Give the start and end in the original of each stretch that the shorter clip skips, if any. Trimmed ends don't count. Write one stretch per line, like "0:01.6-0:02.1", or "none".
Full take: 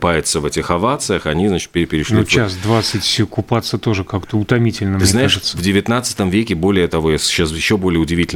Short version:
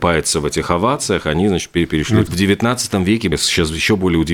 0:02.3-0:05.5
0:06.6-0:07.1